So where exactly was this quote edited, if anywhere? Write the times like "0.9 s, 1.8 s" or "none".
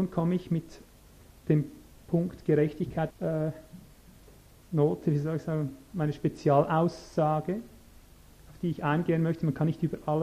3.1 s